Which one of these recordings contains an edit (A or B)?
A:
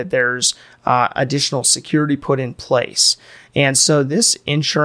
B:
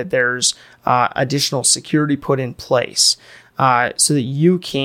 B